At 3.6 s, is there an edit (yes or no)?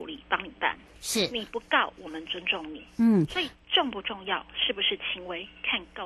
no